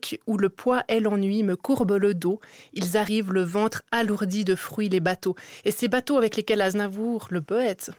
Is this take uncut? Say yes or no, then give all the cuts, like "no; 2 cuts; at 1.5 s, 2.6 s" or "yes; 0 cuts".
yes; 0 cuts